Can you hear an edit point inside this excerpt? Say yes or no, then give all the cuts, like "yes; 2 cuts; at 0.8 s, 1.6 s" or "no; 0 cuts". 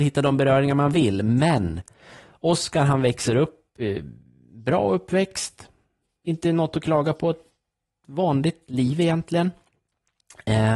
no; 0 cuts